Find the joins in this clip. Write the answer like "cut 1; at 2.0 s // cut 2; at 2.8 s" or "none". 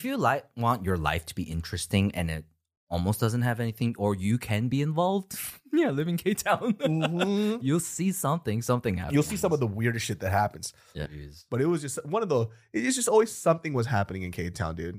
cut 1; at 11.0 s